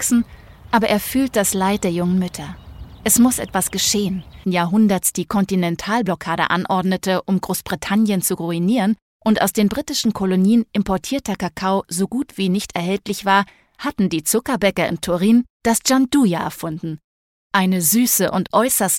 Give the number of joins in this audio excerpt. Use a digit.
1